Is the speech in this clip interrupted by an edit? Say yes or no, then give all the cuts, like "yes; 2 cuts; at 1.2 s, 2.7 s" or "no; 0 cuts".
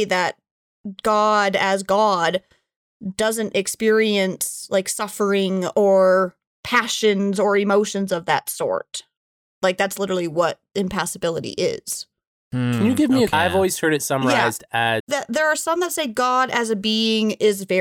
yes; 2 cuts; at 13.3 s, 15.0 s